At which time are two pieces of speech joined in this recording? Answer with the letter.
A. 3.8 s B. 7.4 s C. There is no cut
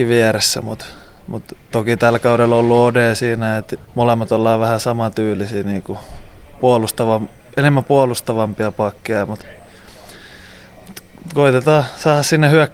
A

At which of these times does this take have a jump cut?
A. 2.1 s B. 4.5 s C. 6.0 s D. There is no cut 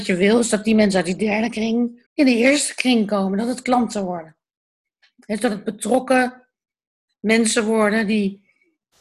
A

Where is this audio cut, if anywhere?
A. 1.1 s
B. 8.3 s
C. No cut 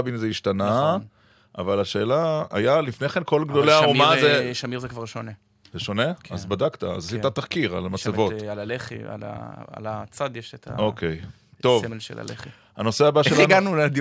C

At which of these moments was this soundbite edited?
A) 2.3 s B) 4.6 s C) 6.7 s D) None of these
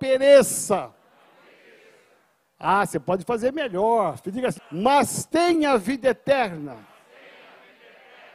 B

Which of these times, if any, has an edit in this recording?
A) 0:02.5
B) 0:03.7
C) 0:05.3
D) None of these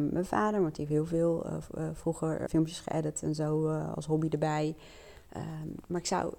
A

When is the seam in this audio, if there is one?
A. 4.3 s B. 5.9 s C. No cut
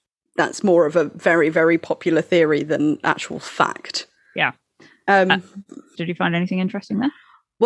B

